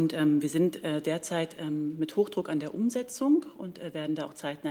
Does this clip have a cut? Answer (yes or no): no